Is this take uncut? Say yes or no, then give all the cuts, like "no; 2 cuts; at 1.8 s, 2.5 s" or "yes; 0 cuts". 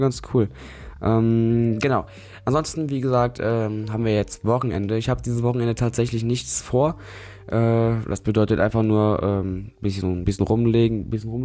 yes; 0 cuts